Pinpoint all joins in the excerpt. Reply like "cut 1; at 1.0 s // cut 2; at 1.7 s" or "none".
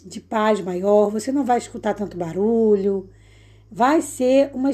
none